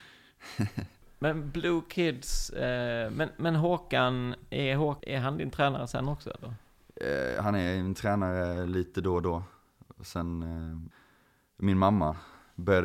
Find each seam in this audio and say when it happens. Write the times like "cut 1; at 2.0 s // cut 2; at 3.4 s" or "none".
none